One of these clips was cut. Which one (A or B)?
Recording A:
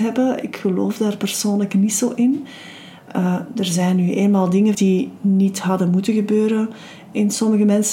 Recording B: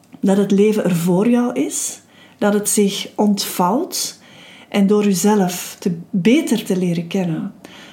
A